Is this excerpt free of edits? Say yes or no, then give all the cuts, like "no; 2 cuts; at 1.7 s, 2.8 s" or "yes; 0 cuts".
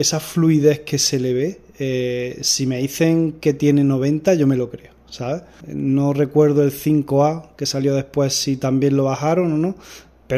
no; 1 cut; at 5.6 s